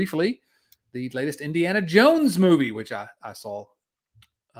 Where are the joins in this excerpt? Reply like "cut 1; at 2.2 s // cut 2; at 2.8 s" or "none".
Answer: none